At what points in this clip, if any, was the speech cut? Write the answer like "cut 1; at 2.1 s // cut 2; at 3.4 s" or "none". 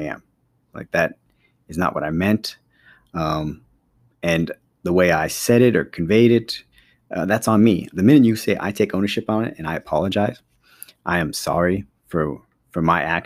cut 1; at 7.9 s